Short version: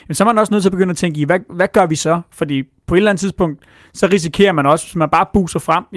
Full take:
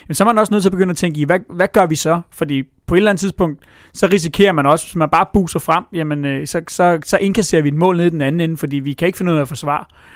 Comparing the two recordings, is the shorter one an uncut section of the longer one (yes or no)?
yes